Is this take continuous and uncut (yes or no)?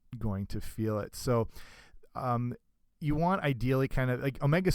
yes